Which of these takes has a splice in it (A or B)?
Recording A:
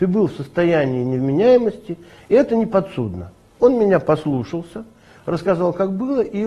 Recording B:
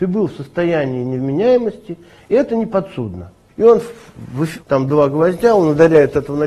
B